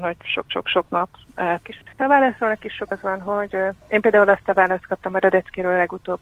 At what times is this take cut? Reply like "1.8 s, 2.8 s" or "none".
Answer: 1.6 s